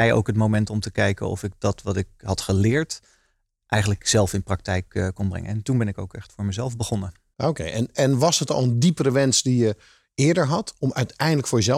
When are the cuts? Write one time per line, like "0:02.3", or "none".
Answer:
none